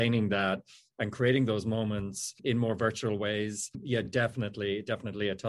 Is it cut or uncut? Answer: uncut